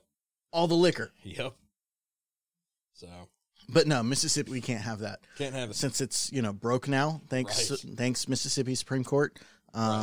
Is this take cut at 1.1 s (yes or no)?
no